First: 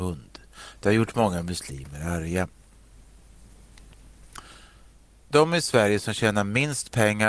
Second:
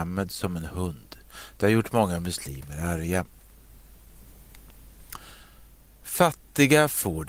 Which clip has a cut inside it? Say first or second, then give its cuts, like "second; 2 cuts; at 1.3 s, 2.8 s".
first; 1 cut; at 5.2 s